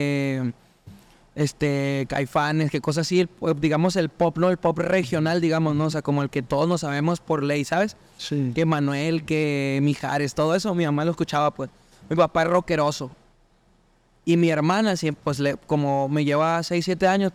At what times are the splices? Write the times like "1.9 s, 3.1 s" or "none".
none